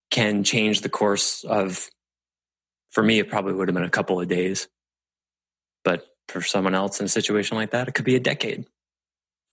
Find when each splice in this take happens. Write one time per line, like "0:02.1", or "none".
none

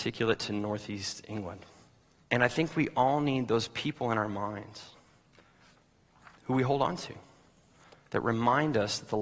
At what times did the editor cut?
0:02.2
0:06.4

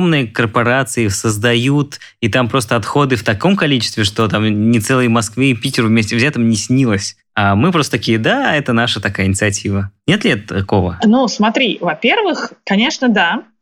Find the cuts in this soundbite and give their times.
none

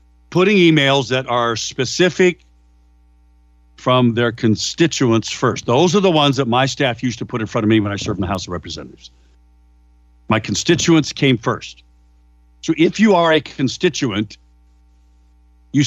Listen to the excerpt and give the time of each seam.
none

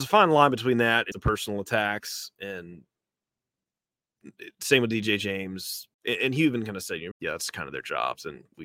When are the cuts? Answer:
0:01.1
0:05.9
0:07.1

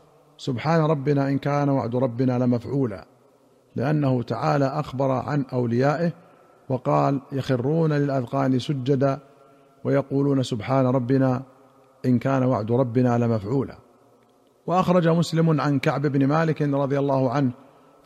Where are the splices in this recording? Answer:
none

